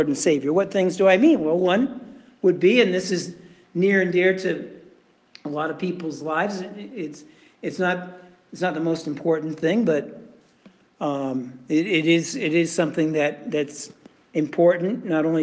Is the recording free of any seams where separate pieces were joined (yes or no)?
yes